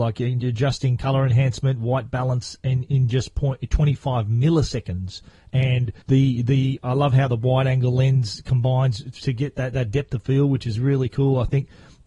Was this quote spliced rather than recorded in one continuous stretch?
yes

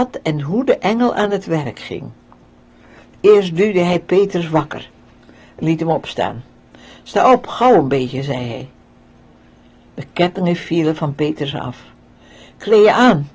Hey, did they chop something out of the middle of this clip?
no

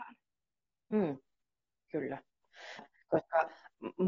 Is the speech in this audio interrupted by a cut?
yes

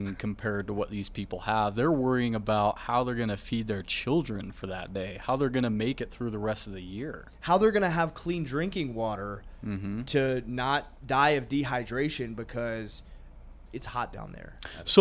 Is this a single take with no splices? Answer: no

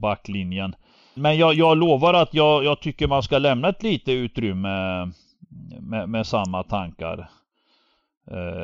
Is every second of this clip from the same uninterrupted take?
no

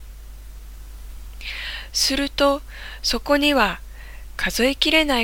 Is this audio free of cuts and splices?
yes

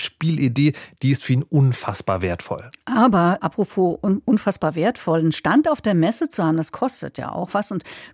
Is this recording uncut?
no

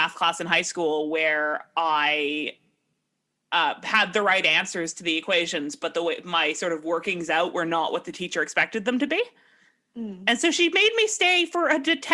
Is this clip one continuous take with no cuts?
yes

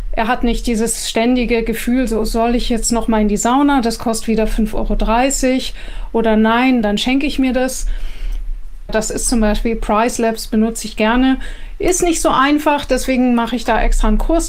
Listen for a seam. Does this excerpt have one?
yes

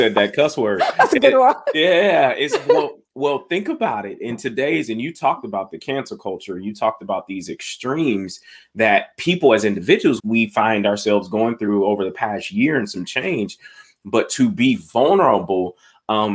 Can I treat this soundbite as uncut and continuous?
no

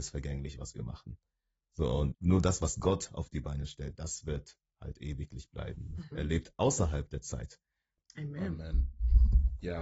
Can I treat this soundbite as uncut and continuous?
no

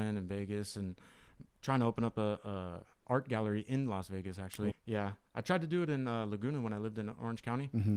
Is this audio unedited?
no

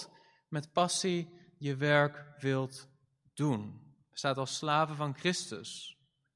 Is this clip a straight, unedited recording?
yes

